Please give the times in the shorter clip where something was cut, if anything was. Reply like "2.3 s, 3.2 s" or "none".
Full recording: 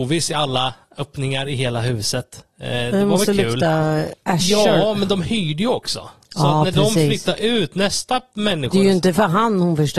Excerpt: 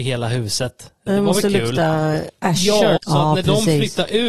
1.1 s, 3.0 s